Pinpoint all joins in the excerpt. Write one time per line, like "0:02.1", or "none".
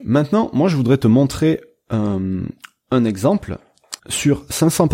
0:04.0